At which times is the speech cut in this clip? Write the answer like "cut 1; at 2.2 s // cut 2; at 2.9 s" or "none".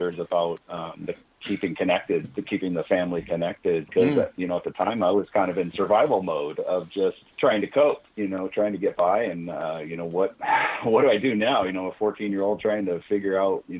cut 1; at 7.3 s